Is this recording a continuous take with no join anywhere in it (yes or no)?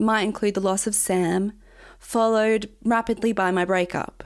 yes